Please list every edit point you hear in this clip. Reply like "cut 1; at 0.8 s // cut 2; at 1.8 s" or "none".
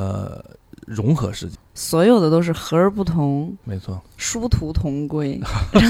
cut 1; at 1.6 s // cut 2; at 3.6 s